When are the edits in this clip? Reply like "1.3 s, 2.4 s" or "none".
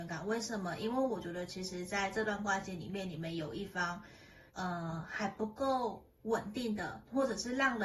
4.5 s